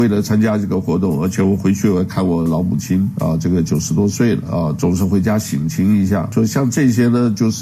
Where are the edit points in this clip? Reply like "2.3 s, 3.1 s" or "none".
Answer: none